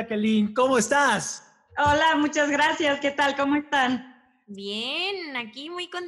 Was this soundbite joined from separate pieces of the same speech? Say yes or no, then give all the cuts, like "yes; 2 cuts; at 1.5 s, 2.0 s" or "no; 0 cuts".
no; 0 cuts